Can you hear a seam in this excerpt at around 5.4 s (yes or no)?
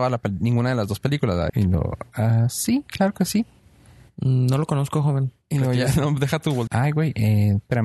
no